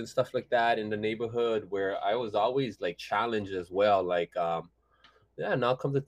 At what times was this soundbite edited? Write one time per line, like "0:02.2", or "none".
none